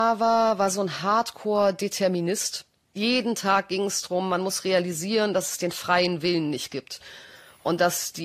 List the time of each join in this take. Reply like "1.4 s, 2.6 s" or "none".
none